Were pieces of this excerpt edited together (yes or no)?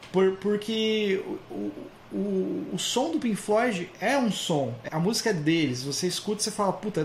yes